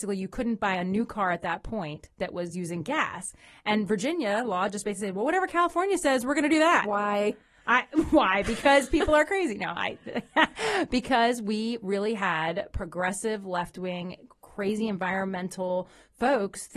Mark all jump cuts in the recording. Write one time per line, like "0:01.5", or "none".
none